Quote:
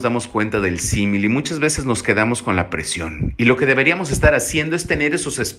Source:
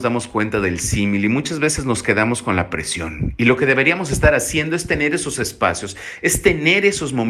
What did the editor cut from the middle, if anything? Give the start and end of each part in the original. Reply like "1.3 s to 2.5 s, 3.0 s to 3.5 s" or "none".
none